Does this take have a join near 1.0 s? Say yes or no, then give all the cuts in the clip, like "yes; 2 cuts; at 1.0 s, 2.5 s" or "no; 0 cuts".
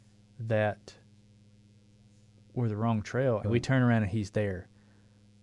no; 1 cut; at 3.4 s